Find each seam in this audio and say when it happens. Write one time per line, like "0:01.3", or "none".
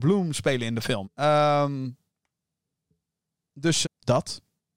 0:01.0
0:03.8